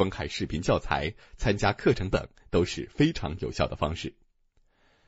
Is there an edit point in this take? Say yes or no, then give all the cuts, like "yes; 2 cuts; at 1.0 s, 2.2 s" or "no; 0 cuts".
yes; 1 cut; at 2.1 s